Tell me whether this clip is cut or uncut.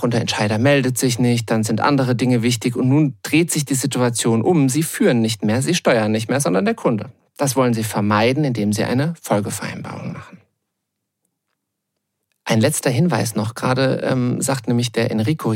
uncut